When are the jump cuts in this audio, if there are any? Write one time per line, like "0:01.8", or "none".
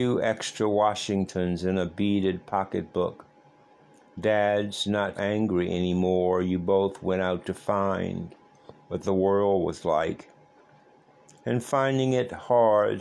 0:05.2